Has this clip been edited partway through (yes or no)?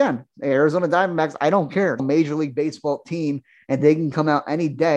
yes